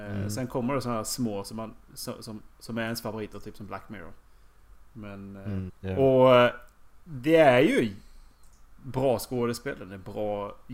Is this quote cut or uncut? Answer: cut